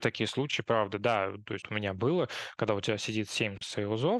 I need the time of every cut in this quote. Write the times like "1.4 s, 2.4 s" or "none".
1.6 s

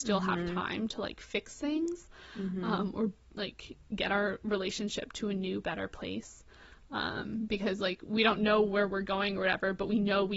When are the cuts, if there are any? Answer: none

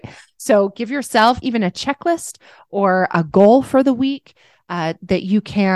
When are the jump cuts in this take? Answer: 1.4 s

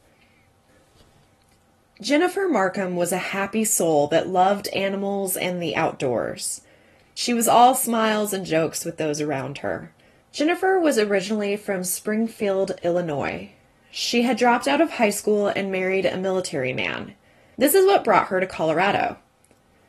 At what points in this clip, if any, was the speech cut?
none

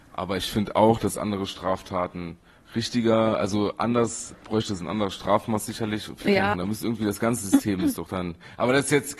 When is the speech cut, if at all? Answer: 4.3 s, 6.5 s

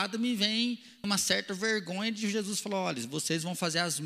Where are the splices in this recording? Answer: 1.0 s

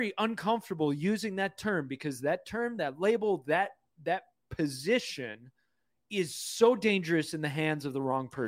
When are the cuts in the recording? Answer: none

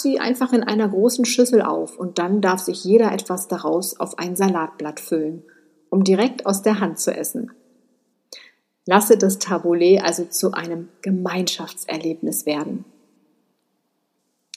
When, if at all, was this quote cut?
none

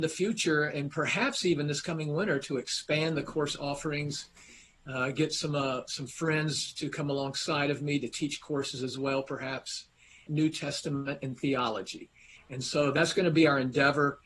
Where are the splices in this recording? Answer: 10.3 s, 12.4 s

